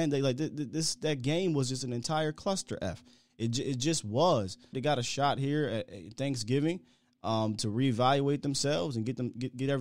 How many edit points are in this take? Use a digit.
1